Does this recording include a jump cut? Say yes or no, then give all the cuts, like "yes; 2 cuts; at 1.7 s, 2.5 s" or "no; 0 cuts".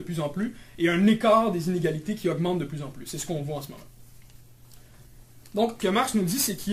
yes; 1 cut; at 5.8 s